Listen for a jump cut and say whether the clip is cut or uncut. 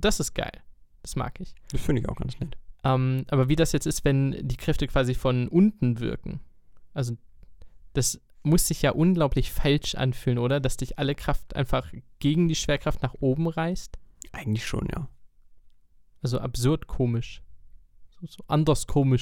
uncut